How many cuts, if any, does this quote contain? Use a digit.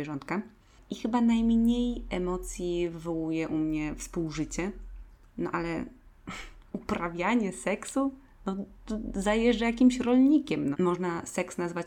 1